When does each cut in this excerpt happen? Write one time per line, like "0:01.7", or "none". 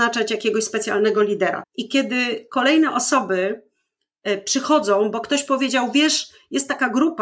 0:01.6